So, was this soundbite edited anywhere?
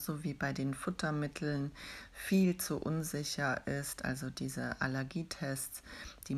no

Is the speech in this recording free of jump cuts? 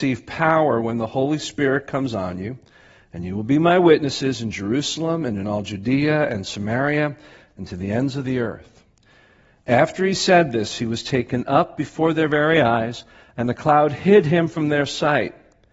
yes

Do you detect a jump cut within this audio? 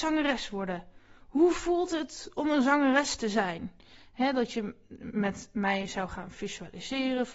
no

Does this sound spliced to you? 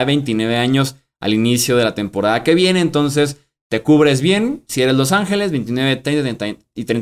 no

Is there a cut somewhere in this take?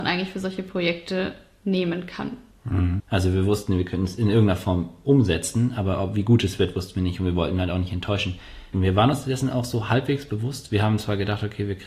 yes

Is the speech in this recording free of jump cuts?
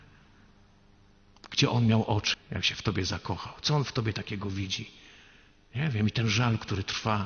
no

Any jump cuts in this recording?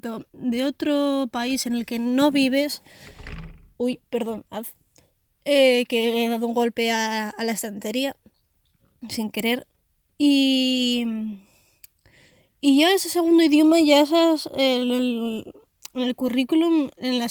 no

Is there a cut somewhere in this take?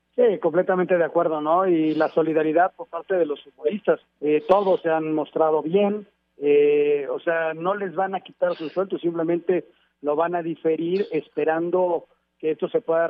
yes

